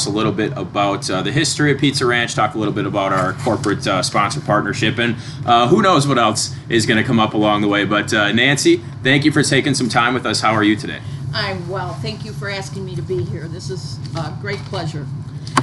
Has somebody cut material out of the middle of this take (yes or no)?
no